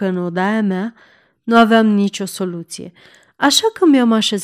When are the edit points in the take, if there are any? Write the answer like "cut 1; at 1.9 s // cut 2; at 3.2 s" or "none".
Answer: none